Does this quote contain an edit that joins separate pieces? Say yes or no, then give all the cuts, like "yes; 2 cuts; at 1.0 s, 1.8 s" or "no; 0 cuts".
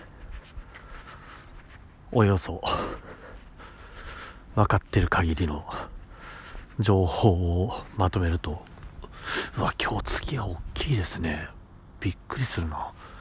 no; 0 cuts